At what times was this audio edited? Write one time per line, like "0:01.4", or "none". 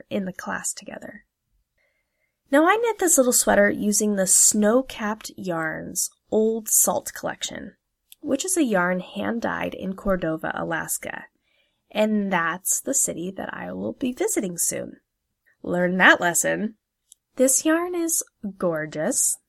0:15.5
0:17.2